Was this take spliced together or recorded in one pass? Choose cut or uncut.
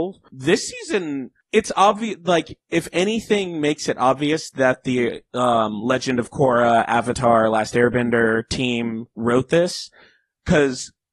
cut